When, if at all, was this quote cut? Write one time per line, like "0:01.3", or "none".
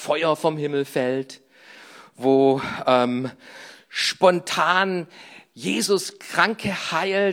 none

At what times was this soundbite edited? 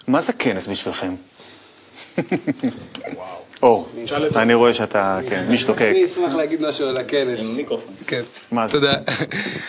0:08.0

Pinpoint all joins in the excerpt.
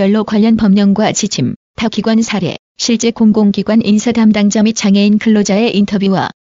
none

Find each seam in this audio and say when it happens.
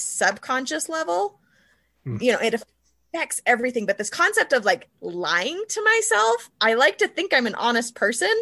0:02.2

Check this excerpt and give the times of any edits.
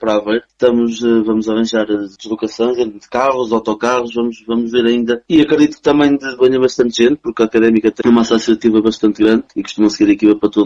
0:05.2
0:06.4
0:08.0

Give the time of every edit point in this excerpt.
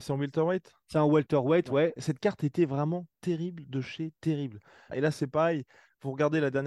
0:02.0
0:04.9

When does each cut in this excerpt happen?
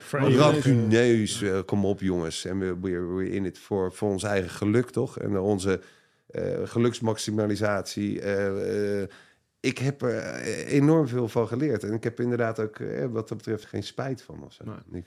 0:02.4
0:13.6

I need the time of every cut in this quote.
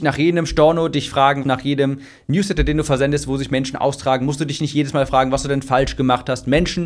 0:01.4

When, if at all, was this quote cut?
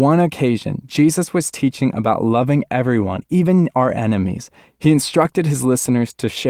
none

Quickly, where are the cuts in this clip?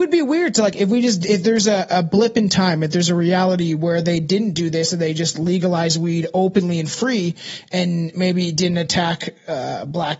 none

